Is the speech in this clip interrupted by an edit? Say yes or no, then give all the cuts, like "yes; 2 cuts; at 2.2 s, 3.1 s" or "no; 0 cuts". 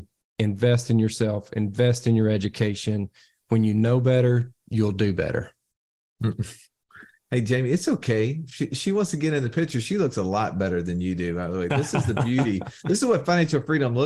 no; 0 cuts